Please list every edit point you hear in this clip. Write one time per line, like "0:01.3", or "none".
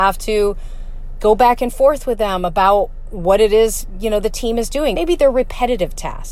0:01.2
0:04.9